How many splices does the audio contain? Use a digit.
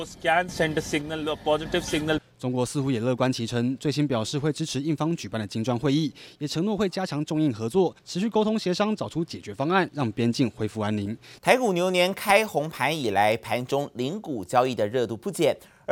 1